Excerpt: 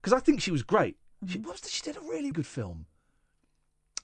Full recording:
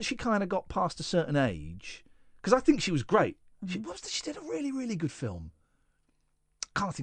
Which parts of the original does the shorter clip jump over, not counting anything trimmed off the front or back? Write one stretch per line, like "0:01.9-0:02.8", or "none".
0:04.7-0:05.0